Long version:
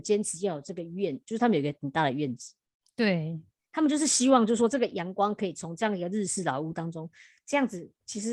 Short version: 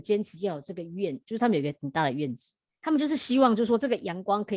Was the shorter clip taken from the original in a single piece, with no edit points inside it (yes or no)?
no